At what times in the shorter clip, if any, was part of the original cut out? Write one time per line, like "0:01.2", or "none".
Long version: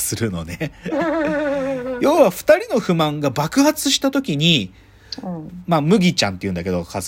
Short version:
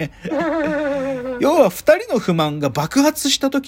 none